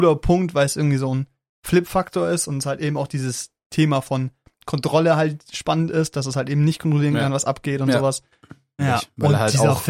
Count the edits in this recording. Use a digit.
1